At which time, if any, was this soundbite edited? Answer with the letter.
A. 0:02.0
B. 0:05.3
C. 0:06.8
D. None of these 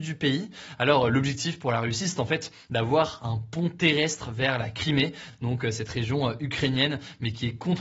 D